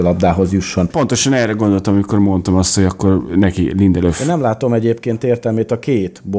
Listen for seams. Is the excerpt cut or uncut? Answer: uncut